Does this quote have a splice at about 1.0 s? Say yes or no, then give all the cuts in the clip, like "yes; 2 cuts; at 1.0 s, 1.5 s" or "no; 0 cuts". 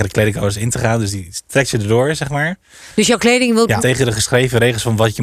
no; 1 cut; at 3.8 s